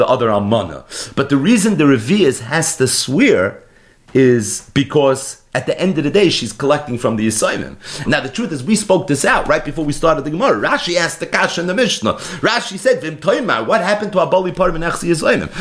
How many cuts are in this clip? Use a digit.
1